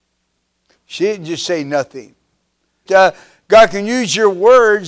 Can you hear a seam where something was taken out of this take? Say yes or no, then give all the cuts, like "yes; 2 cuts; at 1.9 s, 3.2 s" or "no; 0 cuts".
yes; 1 cut; at 2.9 s